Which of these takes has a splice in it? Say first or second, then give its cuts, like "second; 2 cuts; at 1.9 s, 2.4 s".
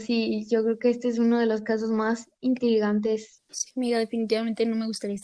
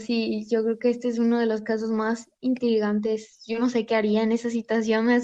first; 1 cut; at 3.4 s